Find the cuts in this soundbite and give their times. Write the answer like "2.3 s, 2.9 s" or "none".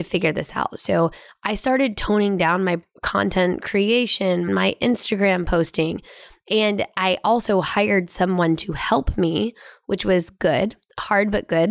4.5 s

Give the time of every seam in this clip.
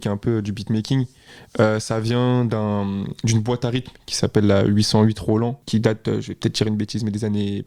none

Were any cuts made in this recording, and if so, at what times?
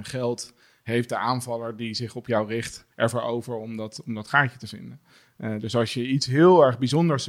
2.9 s

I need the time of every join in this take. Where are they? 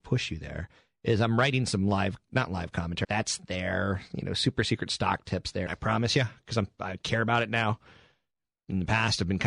3.0 s, 5.7 s

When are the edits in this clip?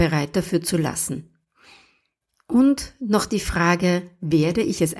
none

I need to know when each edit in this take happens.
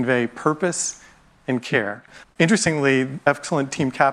2.2 s

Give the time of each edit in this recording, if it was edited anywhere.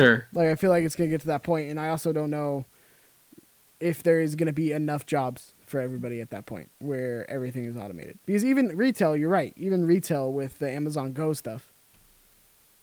6.7 s

